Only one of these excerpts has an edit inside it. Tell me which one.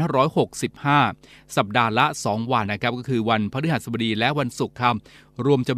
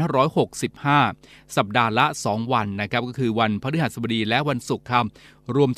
first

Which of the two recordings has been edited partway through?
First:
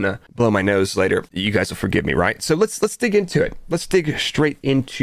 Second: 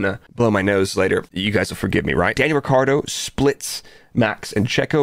second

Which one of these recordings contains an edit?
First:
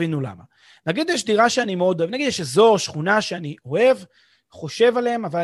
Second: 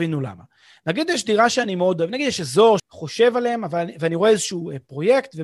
second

